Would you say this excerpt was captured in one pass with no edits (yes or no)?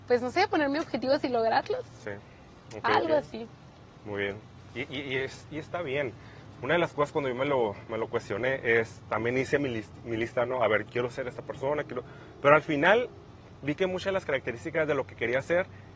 yes